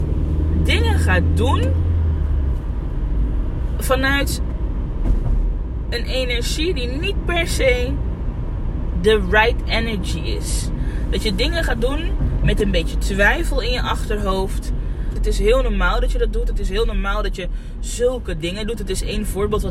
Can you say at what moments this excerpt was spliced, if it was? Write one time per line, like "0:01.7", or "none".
0:15.2